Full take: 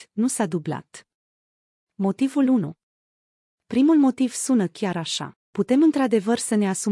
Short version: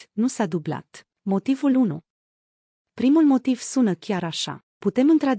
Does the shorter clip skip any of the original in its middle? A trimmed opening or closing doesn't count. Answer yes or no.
yes